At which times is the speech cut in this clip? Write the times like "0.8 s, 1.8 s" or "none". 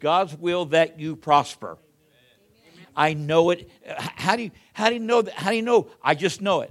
2.8 s